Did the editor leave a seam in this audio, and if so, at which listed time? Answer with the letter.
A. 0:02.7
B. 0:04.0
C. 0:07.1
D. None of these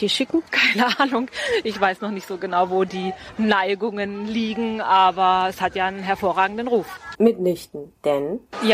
C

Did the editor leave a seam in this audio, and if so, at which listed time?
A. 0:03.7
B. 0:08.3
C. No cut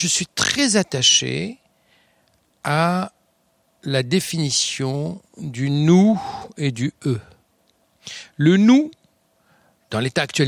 C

